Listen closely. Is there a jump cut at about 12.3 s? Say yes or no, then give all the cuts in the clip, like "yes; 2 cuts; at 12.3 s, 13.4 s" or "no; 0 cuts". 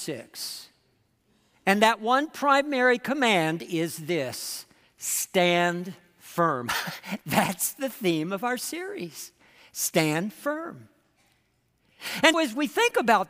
yes; 1 cut; at 12.3 s